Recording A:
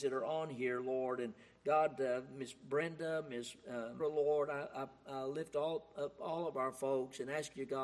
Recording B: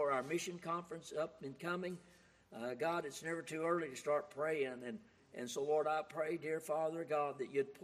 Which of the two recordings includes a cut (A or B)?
A